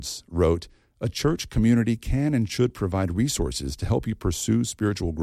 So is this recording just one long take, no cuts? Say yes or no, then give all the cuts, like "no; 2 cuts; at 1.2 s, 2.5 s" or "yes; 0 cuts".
yes; 0 cuts